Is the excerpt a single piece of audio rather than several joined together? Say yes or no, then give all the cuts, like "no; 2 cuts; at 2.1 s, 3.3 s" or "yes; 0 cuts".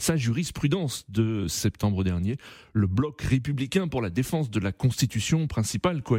yes; 0 cuts